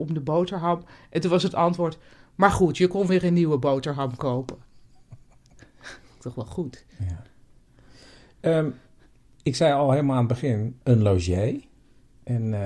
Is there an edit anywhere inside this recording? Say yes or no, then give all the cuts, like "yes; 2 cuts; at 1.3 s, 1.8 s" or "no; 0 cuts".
yes; 1 cut; at 10.8 s